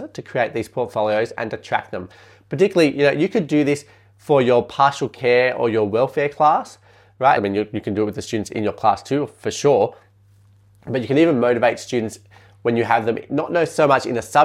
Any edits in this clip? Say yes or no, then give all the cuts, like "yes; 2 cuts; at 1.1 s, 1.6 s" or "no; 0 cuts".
yes; 1 cut; at 7.4 s